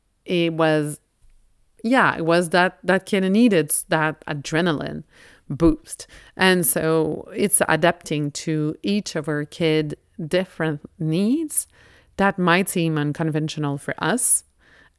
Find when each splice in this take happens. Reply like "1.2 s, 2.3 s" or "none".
none